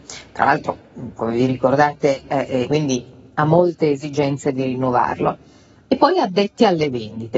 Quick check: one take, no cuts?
no; 1 cut; at 2.6 s

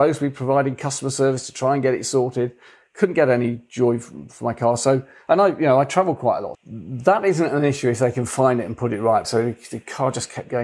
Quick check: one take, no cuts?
no; 2 cuts; at 6.5 s, 9.2 s

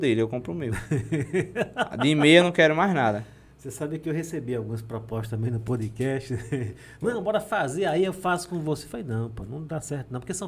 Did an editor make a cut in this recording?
no; 0 cuts

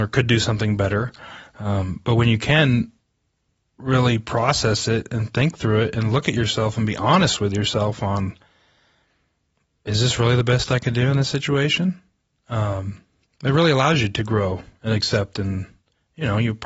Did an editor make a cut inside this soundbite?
no; 0 cuts

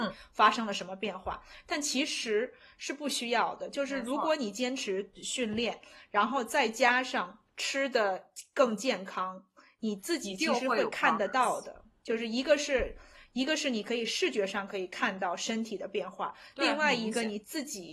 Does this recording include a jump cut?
yes; 1 cut; at 7.5 s

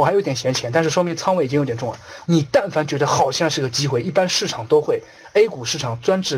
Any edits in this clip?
yes; 1 cut; at 2.2 s

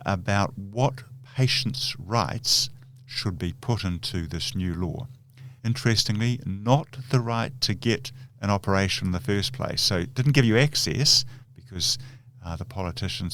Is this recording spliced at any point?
yes; 1 cut; at 5.6 s

